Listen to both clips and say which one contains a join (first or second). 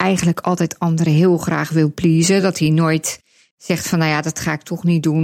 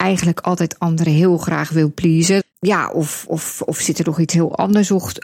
second